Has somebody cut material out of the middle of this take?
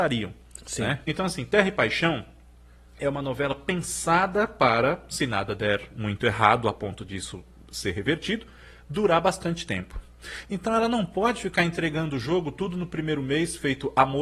yes; 1 cut; at 1.0 s

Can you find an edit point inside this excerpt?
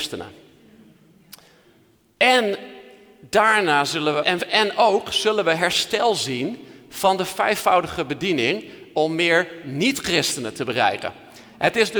yes; 1 cut; at 4.2 s

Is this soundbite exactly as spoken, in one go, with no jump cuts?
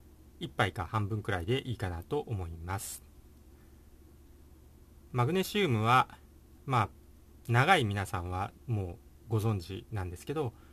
no; 1 cut; at 5.1 s

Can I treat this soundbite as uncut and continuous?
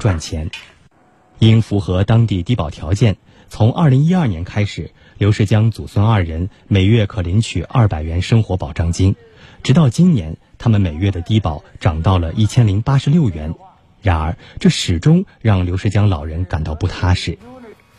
yes; 0 cuts

